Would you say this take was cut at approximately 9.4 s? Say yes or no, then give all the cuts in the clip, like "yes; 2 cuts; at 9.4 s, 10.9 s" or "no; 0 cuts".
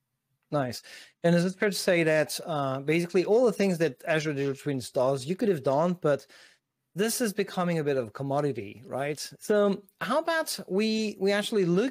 yes; 1 cut; at 9.4 s